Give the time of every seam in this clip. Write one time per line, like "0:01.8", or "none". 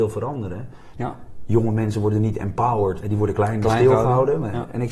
0:00.9
0:03.0

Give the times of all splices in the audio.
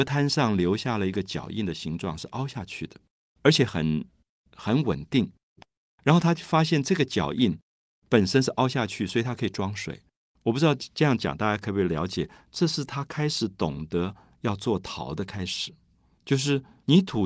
0:05.6

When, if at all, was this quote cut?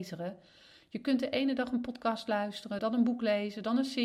0:02.8

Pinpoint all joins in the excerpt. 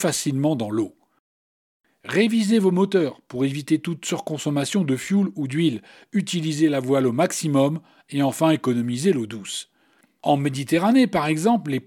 0:10.2

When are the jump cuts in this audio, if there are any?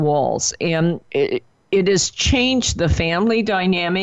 0:01.0

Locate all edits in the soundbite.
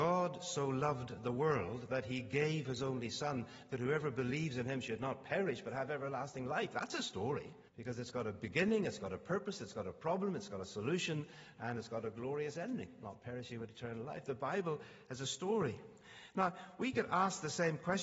0:07.7

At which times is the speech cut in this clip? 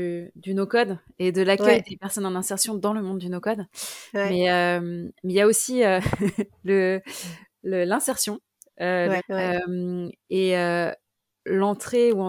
0:09.2

